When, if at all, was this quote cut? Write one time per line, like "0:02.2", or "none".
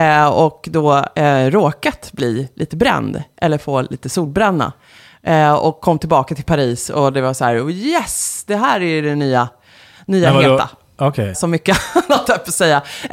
0:11.3